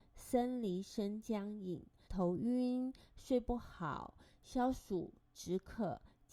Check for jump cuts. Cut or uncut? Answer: cut